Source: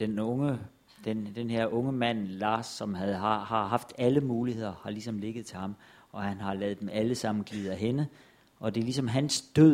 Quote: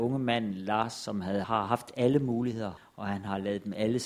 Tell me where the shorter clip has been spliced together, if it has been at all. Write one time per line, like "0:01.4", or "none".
0:01.4
0:02.8